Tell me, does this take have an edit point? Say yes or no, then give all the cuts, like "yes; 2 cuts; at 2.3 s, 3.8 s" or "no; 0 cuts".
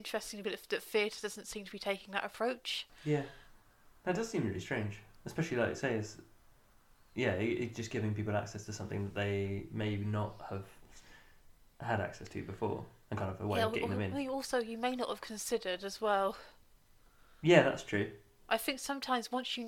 no; 0 cuts